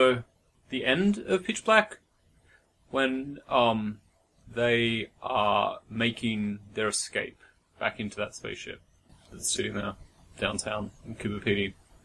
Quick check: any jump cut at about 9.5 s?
yes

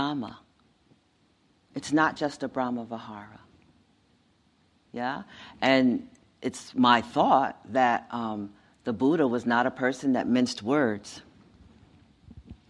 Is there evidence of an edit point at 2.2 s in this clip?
no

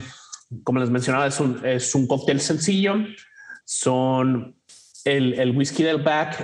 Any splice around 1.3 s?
no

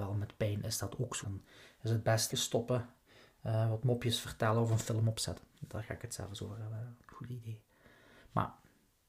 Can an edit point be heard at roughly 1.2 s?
yes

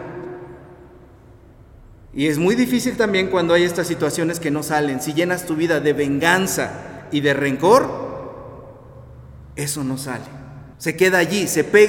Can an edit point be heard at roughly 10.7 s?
yes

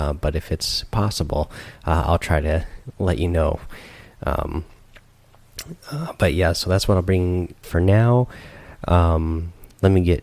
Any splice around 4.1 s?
no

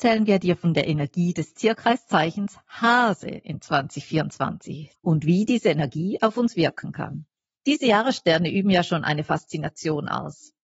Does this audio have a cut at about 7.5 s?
no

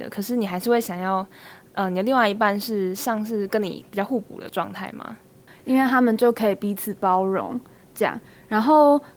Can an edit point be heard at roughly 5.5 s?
yes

